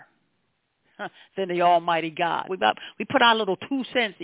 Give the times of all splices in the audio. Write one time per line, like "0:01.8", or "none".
0:02.5